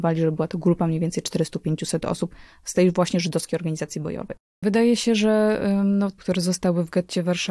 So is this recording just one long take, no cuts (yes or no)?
no